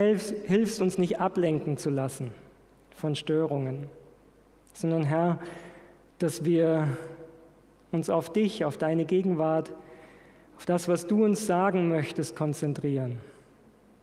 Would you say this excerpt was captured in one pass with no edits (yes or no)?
yes